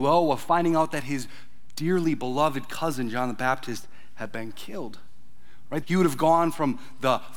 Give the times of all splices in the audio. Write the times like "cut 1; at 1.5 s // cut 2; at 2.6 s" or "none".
cut 1; at 5.8 s